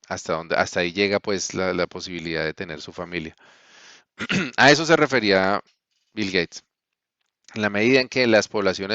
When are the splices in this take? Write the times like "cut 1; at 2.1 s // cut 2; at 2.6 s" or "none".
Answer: none